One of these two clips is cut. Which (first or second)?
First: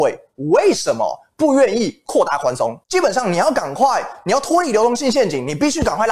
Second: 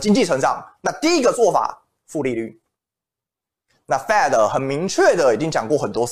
first